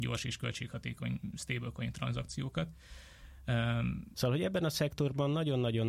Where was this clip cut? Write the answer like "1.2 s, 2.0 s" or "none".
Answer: 4.1 s